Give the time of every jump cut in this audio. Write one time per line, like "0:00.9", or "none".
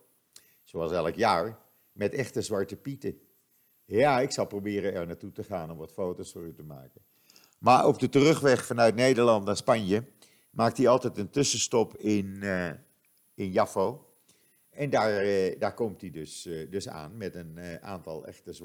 none